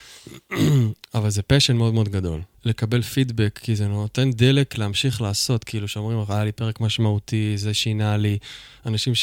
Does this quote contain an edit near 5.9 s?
no; 1 cut; at 2.5 s

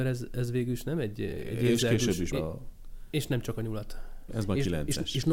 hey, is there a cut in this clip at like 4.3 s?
yes; 2 cuts; at 2.3 s, 4.3 s

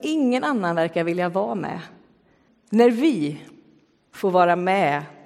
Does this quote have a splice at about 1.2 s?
no; 1 cut; at 2.5 s

